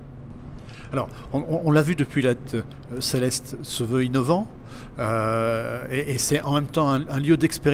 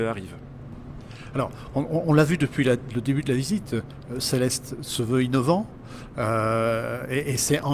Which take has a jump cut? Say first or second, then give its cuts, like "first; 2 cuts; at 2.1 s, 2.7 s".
first; 1 cut; at 2.5 s